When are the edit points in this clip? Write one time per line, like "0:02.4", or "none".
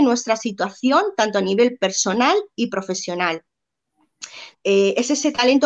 0:04.5